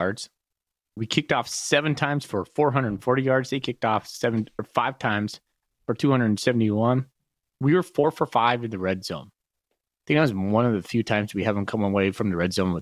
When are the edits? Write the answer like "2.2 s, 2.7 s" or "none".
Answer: none